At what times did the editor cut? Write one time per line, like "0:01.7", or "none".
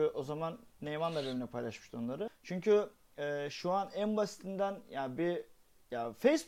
0:02.3